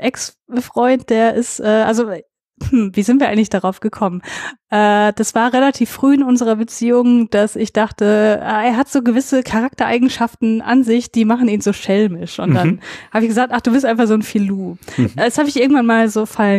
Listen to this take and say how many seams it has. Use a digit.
0